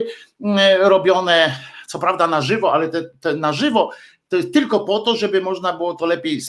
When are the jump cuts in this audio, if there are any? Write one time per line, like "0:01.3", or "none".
none

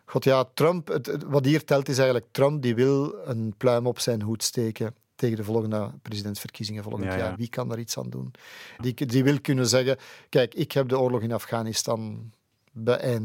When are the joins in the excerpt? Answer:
0:07.4
0:08.8

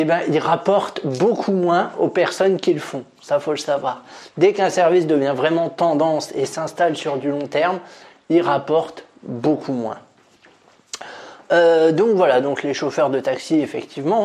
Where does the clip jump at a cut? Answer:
none

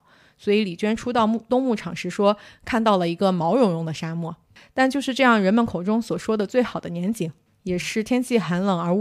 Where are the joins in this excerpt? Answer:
none

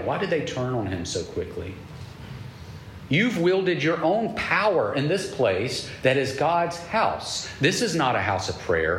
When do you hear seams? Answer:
0:03.1

